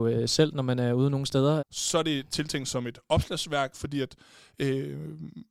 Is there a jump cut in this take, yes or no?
yes